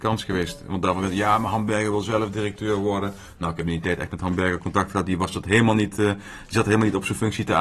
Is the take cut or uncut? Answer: uncut